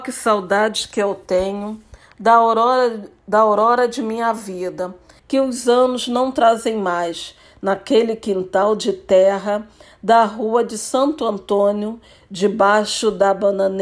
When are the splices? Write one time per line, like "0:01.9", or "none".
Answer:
0:05.2